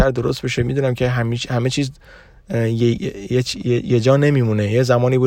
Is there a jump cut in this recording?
yes; 1 cut; at 3.0 s

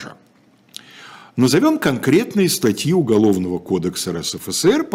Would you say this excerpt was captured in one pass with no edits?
yes; 0 cuts

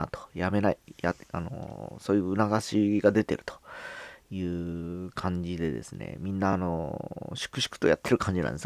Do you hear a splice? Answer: no; 0 cuts

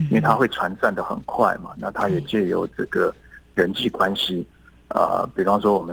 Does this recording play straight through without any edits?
yes; 0 cuts

